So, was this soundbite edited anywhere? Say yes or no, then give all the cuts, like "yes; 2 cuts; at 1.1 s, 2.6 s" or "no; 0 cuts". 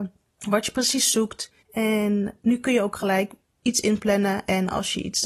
yes; 1 cut; at 1.6 s